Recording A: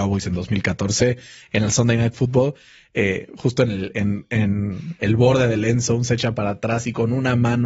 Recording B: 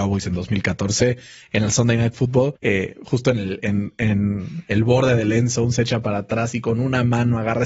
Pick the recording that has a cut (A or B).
B